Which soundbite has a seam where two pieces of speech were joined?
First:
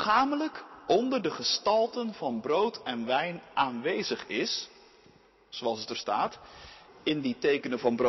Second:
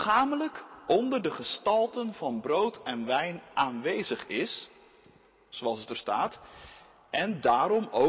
first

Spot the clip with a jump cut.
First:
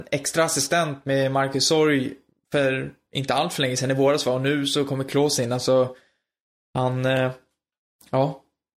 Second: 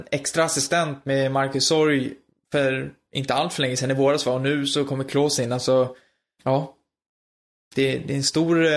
second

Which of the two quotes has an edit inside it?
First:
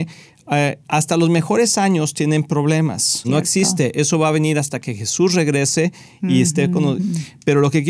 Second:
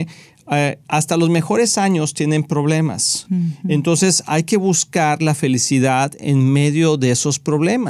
first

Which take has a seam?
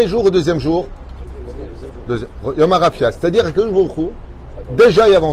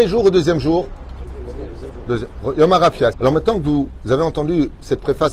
second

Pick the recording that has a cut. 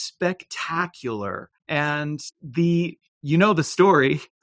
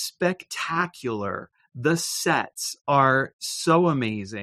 first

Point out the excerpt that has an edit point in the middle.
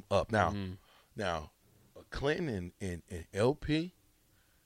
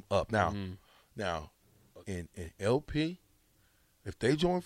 second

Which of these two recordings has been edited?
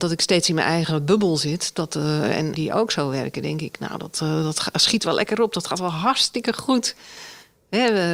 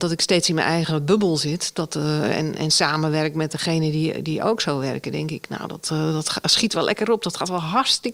first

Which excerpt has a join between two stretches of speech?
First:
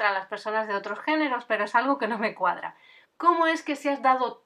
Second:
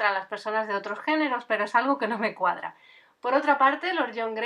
first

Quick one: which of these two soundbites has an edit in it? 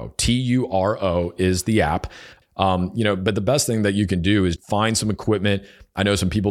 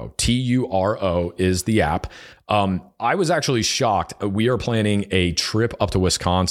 first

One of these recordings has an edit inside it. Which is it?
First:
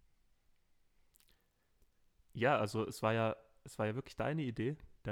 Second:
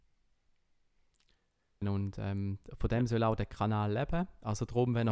second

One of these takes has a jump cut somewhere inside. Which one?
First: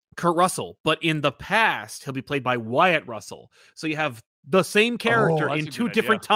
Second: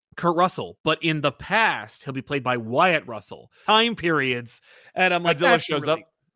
second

